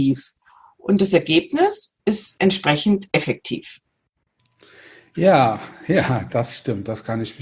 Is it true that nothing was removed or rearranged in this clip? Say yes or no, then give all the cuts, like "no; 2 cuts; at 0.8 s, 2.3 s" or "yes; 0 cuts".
yes; 0 cuts